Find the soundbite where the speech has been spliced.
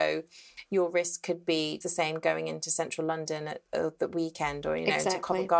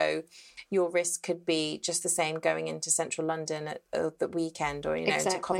first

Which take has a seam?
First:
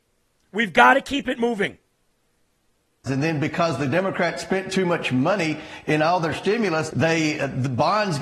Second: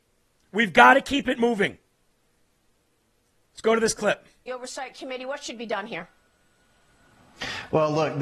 first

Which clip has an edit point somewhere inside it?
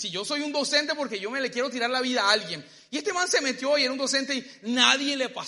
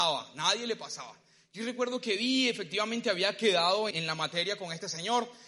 second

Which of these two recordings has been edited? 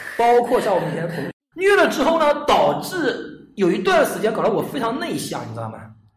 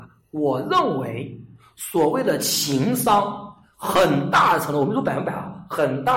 first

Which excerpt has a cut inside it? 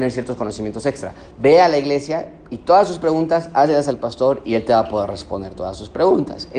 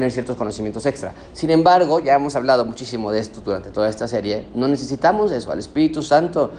first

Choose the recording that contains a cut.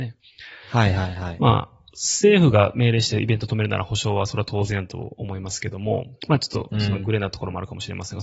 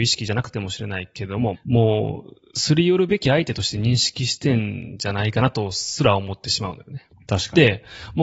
second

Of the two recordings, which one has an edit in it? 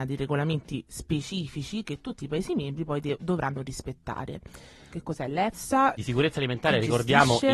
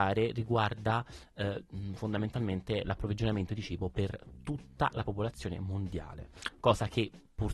first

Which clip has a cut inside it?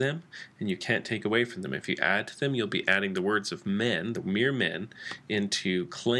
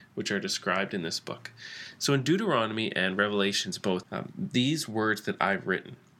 second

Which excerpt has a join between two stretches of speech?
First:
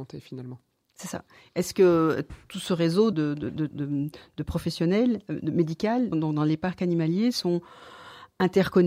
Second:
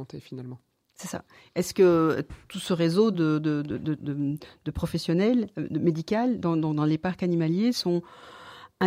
first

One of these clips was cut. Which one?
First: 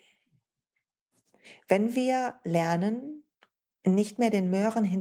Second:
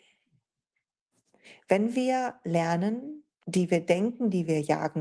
second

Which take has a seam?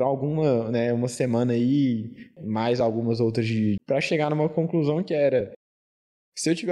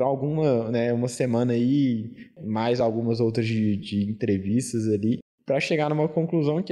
first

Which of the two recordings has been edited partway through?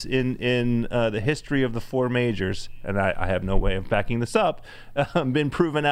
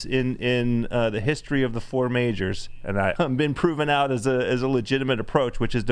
second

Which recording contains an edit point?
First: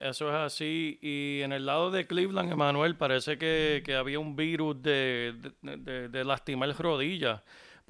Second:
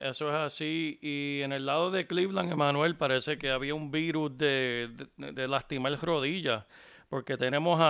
second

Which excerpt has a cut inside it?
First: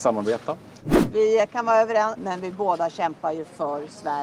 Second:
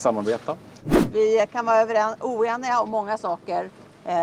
first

